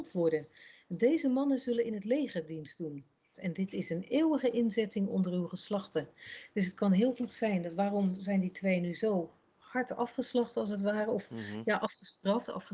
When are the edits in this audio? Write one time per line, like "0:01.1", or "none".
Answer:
0:03.3

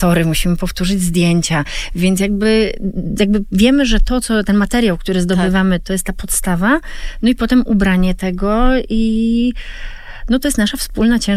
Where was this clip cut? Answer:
none

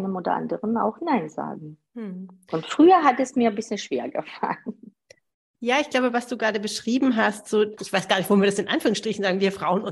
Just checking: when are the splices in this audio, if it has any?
0:07.8

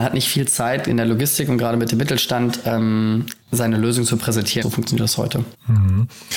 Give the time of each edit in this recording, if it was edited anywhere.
0:03.4
0:04.6

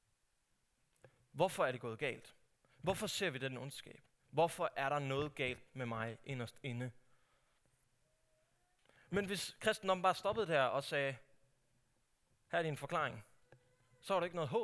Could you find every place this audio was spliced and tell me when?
none

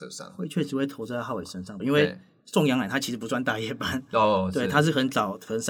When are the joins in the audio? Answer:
0:01.8

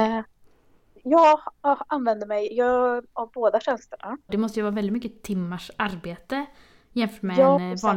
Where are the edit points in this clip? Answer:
0:04.3

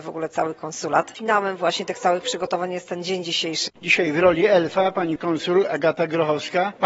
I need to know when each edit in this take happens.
0:03.7

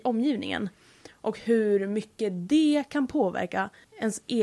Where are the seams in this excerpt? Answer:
none

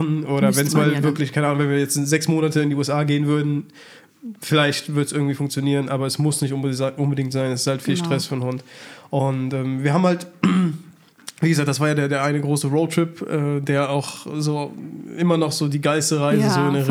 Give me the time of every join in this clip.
none

